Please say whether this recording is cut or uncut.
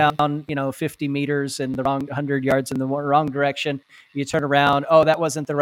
uncut